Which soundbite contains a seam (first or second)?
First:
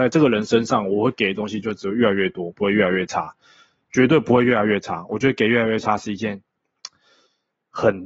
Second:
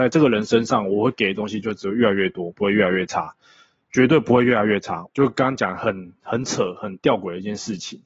second